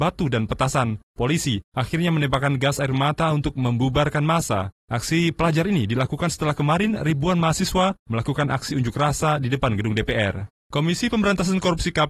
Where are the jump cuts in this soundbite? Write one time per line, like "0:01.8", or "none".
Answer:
0:10.6